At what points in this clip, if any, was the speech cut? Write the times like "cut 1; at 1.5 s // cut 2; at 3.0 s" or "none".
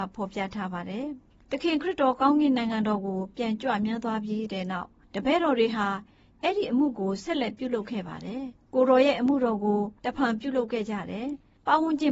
cut 1; at 10.0 s